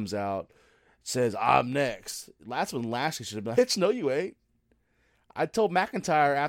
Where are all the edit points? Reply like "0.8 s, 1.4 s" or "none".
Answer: 3.5 s